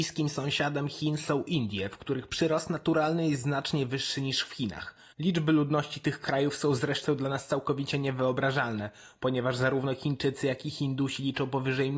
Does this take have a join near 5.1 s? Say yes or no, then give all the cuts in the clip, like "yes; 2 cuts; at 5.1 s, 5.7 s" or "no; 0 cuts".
yes; 1 cut; at 5.1 s